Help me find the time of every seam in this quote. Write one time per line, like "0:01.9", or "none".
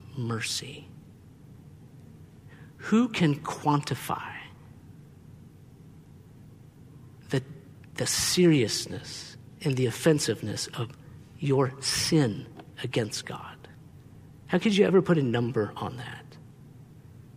none